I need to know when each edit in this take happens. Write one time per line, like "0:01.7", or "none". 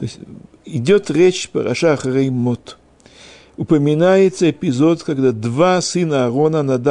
none